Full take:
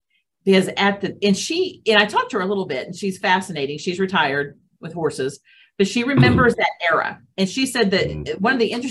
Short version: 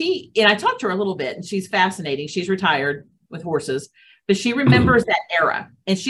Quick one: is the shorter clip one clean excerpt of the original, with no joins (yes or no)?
yes